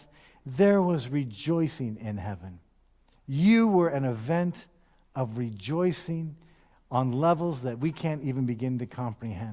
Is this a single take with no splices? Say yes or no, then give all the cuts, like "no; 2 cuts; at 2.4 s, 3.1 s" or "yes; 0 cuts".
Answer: no; 1 cut; at 3.1 s